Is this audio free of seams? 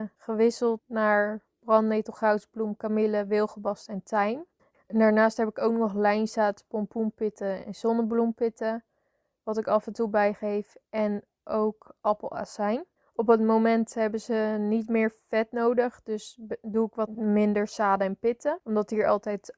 no; 1 cut; at 4.7 s

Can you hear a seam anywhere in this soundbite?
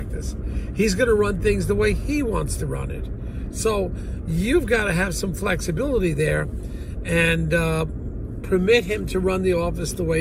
no; 0 cuts

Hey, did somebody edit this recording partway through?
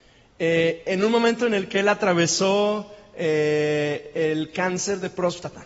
no; 0 cuts

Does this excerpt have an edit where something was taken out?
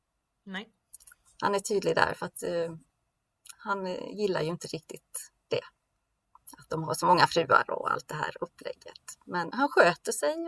yes; 1 cut; at 9.5 s

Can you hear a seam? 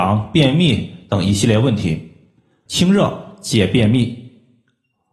yes; 1 cut; at 2.7 s

